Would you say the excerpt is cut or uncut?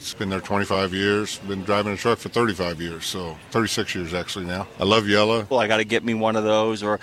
cut